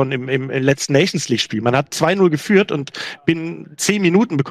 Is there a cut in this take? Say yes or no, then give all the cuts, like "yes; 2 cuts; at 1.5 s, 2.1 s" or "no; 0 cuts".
no; 0 cuts